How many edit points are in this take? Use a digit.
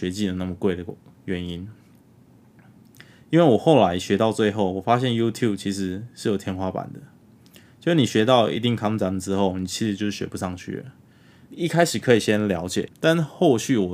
2